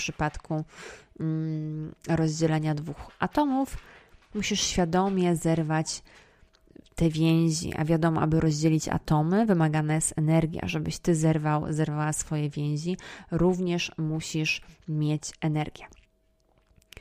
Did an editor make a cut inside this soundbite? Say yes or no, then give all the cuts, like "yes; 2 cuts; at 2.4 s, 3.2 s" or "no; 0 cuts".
no; 0 cuts